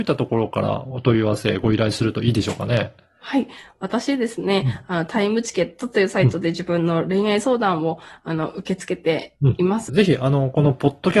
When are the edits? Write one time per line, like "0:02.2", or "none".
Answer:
0:09.9